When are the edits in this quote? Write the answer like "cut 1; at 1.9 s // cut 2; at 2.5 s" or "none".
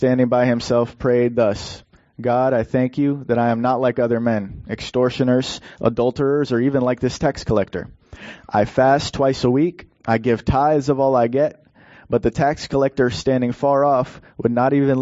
cut 1; at 5.8 s